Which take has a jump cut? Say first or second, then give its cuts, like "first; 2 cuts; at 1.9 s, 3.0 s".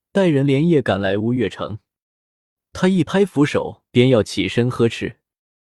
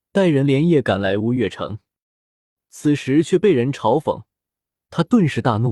first; 2 cuts; at 2.6 s, 3.9 s